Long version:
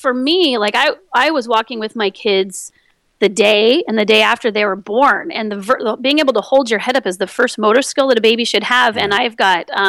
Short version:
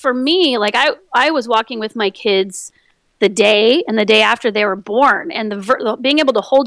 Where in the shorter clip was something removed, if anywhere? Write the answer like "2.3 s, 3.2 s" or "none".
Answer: none